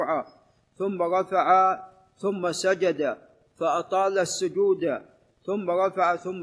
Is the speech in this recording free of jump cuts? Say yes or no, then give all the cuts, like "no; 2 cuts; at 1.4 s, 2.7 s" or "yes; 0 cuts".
yes; 0 cuts